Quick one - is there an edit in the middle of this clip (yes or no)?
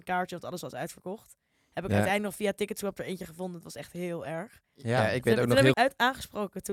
yes